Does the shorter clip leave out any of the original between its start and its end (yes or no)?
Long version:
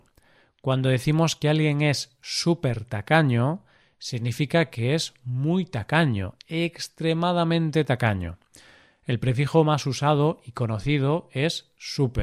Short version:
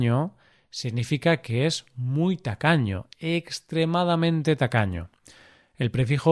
no